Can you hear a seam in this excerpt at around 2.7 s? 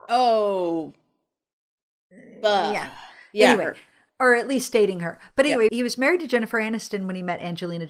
no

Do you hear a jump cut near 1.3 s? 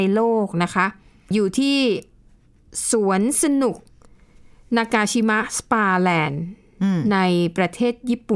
yes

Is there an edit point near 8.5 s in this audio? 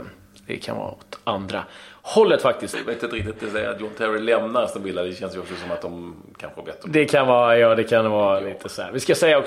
no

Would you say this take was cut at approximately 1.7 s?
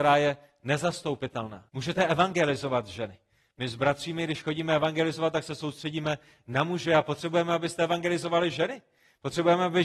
yes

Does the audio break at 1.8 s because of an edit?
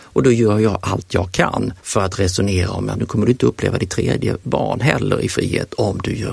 yes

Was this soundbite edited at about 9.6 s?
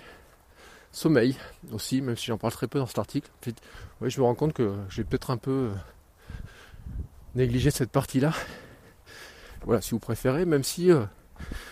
yes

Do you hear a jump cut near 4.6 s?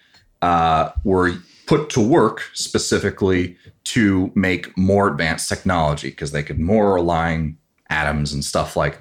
no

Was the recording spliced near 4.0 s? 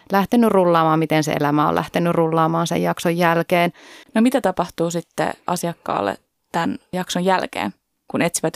yes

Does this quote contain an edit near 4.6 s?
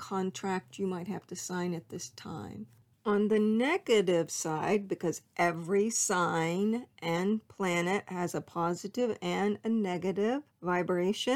no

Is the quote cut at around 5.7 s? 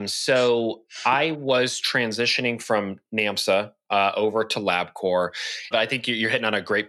yes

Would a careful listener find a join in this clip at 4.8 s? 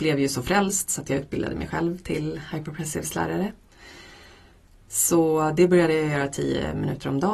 yes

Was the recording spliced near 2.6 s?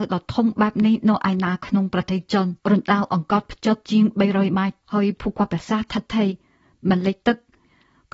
yes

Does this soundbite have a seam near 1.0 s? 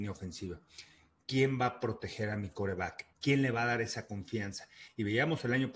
no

